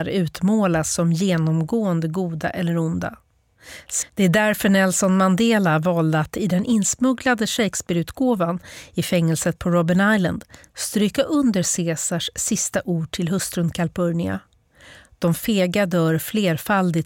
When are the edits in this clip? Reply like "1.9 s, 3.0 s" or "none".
4.0 s